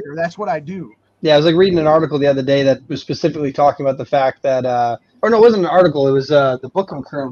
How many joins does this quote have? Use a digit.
1